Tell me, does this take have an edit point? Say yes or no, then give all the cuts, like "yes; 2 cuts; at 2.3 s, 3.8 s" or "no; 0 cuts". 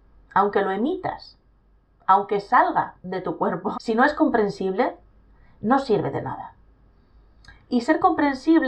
yes; 1 cut; at 3.7 s